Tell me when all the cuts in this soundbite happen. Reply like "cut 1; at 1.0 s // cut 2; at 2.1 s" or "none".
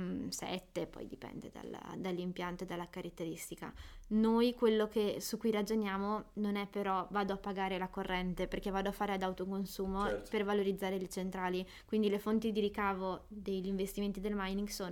none